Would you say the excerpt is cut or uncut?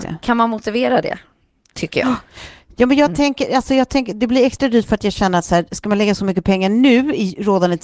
uncut